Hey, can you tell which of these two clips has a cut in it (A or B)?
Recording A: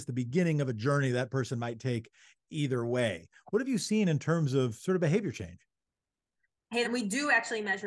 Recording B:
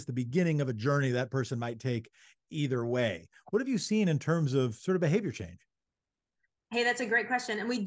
A